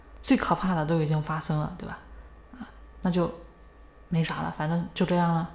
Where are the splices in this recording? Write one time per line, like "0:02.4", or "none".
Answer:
none